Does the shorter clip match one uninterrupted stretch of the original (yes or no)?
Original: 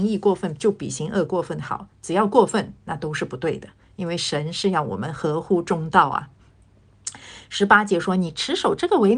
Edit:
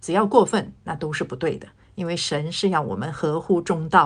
yes